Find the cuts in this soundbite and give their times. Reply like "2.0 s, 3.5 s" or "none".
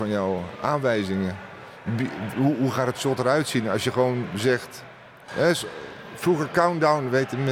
none